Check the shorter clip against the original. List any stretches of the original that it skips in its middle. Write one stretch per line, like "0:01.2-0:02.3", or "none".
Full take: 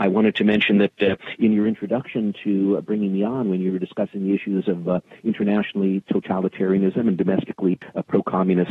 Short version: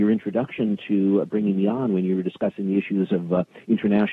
none

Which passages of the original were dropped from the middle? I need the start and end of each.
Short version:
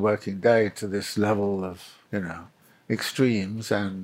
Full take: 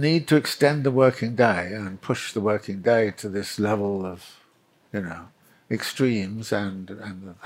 0:04.5-0:04.9

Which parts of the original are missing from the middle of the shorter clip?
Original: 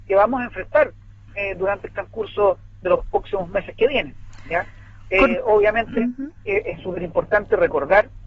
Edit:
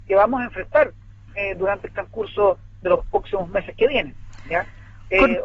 none

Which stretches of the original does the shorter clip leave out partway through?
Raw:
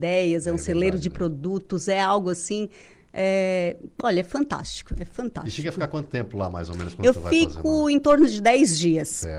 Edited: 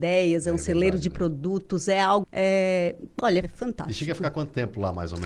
0:02.2-0:03.0
0:04.2-0:05.0

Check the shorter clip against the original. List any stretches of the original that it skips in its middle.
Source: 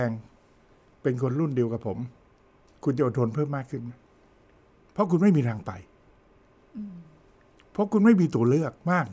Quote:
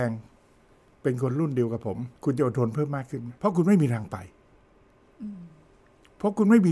0:02.2-0:02.8
0:04.0-0:04.9

